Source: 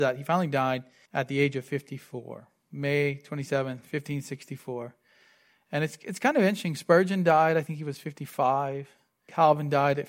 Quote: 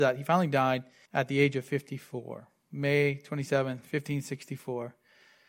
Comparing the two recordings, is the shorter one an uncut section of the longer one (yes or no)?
yes